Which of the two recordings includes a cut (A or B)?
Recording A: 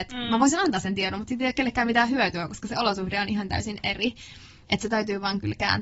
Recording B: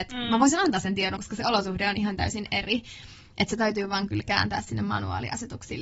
B